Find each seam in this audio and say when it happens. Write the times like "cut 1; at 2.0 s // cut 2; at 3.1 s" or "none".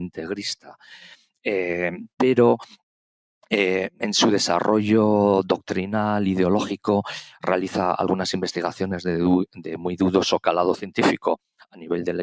none